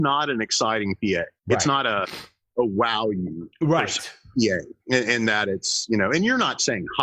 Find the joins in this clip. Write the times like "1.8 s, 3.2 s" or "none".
4.8 s

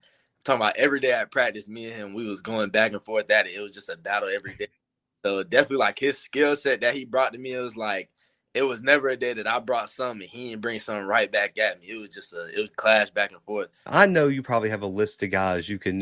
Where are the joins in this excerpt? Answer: 12.7 s, 13.9 s

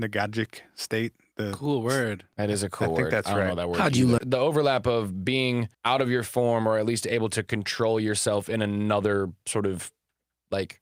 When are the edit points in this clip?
4.2 s, 5.7 s

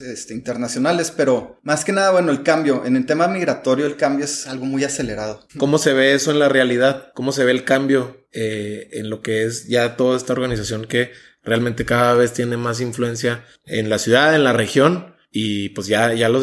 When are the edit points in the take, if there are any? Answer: 5.5 s

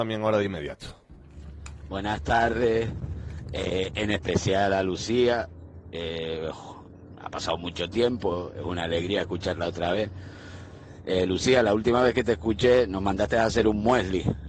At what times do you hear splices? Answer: none

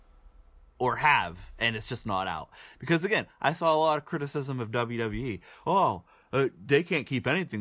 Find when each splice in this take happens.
none

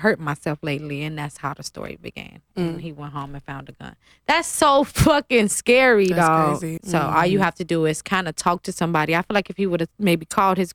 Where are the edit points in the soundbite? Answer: 6.8 s

